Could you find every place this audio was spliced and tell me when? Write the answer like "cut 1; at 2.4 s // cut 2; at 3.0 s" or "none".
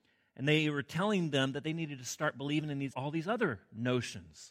cut 1; at 2.9 s